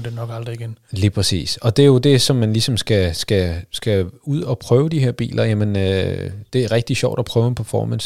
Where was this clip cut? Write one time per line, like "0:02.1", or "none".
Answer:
none